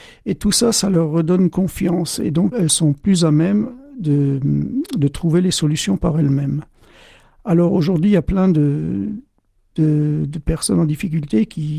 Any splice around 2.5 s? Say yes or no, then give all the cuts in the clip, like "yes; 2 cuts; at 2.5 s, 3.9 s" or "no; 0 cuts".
yes; 1 cut; at 2.5 s